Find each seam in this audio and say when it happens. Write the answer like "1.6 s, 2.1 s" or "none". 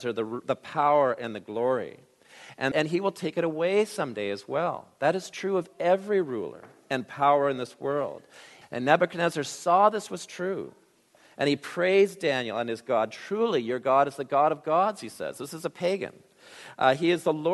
2.7 s, 8.6 s